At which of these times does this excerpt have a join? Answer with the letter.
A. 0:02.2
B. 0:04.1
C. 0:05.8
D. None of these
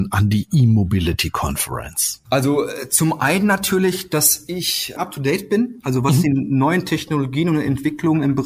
D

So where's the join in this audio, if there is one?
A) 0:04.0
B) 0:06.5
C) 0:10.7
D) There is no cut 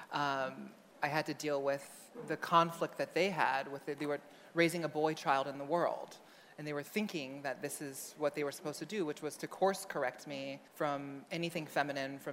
C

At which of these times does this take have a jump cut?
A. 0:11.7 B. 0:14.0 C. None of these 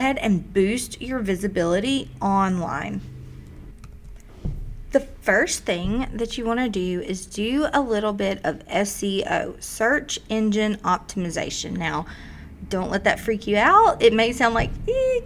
C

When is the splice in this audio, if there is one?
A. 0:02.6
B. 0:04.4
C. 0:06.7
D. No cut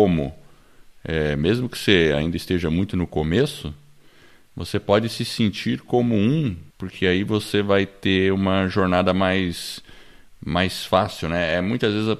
C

